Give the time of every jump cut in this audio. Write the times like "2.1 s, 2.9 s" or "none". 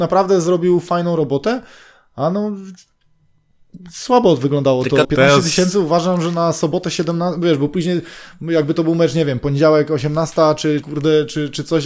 5.0 s, 10.8 s